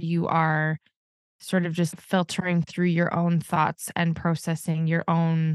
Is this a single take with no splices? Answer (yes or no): no